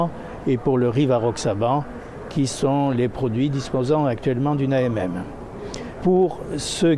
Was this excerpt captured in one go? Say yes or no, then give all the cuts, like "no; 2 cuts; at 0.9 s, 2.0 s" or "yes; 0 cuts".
no; 1 cut; at 6.0 s